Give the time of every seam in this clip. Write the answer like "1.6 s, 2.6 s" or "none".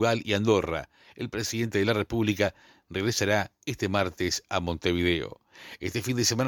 none